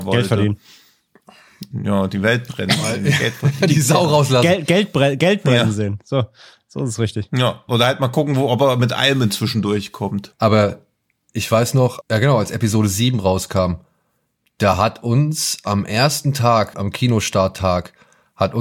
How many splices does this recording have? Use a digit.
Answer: 3